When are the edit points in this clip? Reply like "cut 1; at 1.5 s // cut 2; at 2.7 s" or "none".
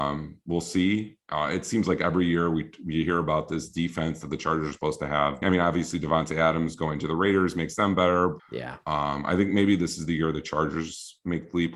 cut 1; at 5.4 s // cut 2; at 8.4 s